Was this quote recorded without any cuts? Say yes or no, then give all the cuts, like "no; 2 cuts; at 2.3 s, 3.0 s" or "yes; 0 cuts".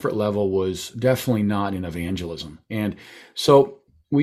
yes; 0 cuts